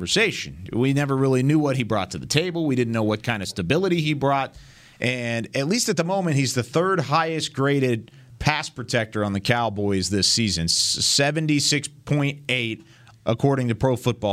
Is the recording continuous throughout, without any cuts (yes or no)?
yes